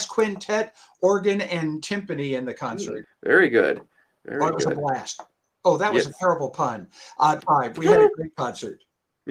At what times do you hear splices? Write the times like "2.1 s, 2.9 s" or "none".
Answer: 3.0 s, 7.4 s